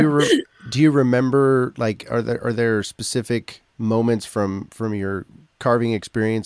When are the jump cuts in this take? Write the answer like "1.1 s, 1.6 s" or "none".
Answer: 3.7 s